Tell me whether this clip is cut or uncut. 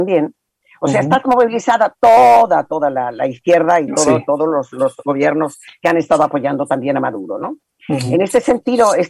uncut